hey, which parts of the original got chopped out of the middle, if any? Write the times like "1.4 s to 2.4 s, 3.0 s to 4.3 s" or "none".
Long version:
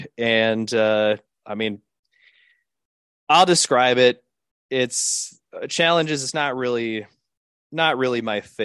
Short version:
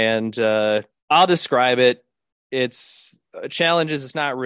1.3 s to 3.2 s